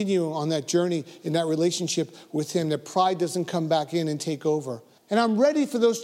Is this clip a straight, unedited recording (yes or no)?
no